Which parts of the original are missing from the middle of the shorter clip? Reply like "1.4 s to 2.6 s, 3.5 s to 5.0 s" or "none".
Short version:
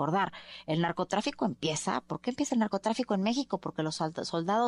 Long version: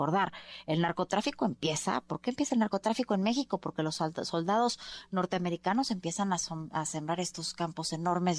none